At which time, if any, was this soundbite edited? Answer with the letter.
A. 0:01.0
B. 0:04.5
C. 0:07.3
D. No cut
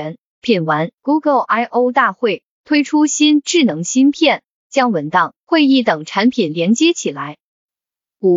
A